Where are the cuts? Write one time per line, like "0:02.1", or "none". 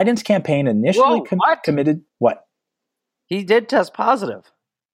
0:02.1